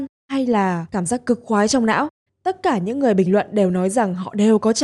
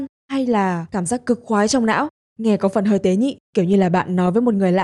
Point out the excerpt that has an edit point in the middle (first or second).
first